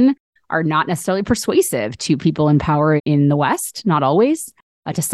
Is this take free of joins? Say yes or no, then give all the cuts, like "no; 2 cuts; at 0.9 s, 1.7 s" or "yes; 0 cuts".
no; 1 cut; at 3.0 s